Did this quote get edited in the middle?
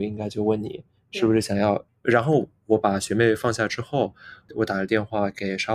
yes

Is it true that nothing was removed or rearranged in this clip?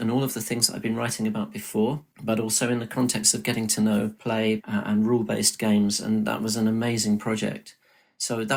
no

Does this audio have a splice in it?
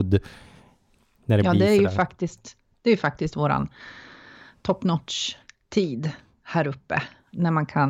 no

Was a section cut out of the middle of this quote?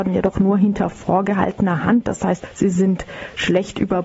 no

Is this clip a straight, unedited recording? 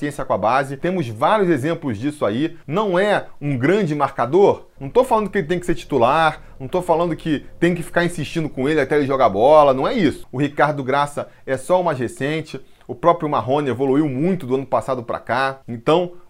no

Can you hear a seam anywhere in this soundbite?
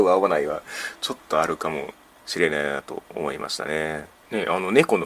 no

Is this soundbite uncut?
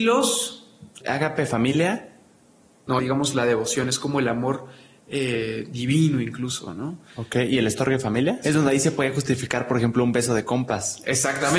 no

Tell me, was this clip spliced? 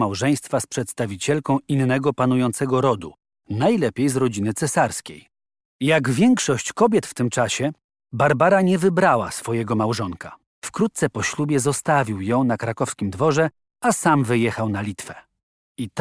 yes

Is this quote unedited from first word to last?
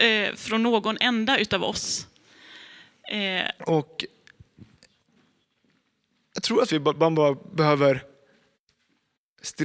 no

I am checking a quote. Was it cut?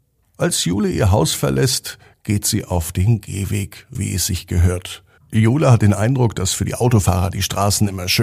yes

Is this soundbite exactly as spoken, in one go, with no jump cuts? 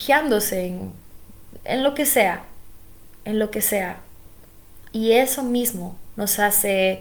no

